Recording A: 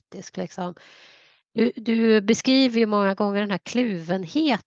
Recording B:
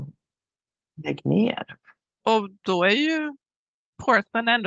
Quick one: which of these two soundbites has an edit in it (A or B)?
B